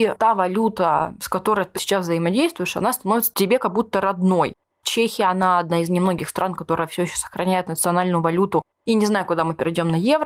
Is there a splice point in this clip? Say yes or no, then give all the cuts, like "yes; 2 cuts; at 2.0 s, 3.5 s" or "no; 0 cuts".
yes; 2 cuts; at 1.7 s, 4.7 s